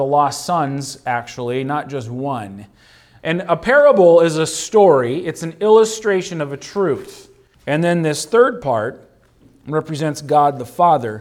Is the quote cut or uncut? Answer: cut